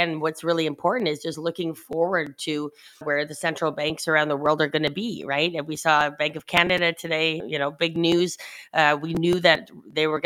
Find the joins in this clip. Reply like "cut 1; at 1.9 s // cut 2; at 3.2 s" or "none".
cut 1; at 3.0 s // cut 2; at 7.4 s